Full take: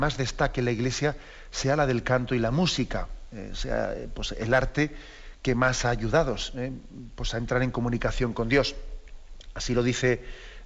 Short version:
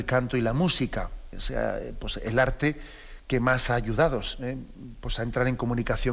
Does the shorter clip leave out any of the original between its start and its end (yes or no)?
yes